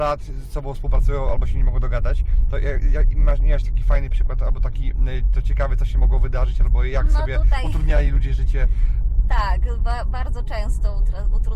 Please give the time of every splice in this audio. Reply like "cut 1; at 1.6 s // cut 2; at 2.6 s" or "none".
none